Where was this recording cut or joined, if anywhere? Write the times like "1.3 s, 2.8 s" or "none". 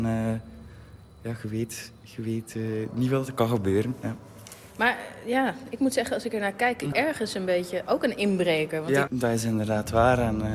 6.9 s, 9.1 s